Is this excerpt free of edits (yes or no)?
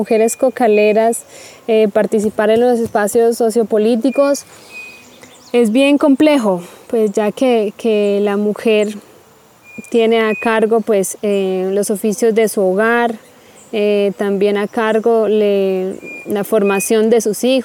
yes